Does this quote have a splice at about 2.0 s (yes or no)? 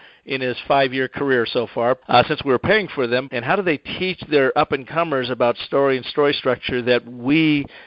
yes